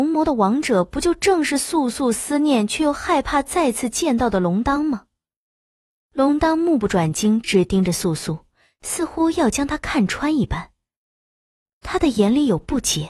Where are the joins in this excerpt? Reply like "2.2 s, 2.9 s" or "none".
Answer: 7.4 s